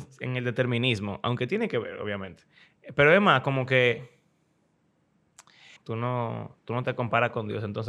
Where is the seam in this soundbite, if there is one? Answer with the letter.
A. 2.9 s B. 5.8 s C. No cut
B